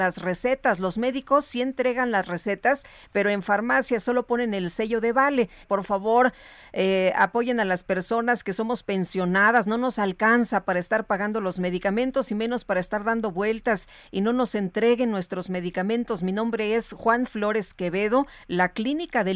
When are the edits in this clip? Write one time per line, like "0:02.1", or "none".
0:05.6